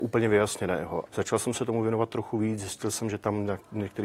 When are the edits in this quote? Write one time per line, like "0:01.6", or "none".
0:01.1

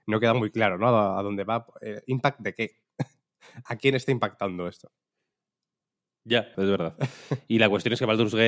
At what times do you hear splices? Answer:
0:03.7
0:06.5

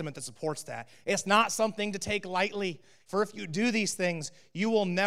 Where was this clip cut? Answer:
0:01.0
0:03.0

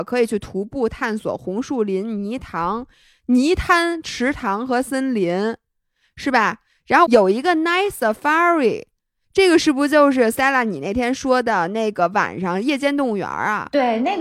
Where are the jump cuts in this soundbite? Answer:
none

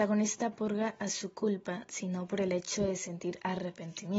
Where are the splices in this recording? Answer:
0:01.9

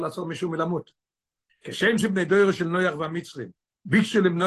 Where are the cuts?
0:01.5

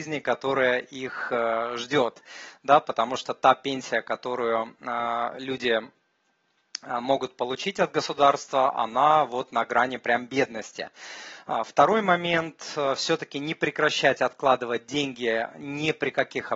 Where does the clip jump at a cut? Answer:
none

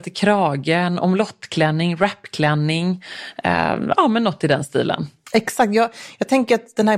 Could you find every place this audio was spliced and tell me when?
none

